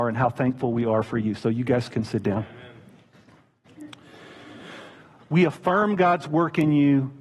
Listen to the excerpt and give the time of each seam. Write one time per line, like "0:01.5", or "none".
0:05.2